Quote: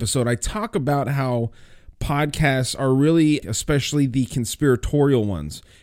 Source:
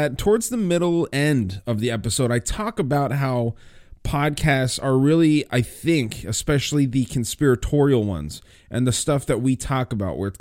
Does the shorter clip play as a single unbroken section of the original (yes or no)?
no